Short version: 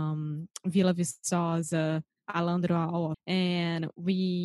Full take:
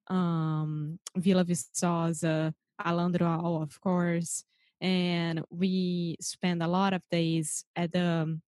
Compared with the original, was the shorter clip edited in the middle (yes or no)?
yes